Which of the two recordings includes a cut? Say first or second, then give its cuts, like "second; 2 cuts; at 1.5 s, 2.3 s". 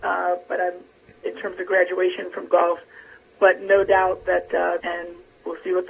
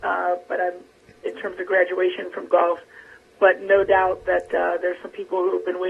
first; 1 cut; at 4.8 s